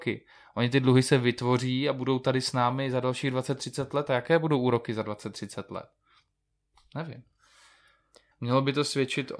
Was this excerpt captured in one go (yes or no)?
no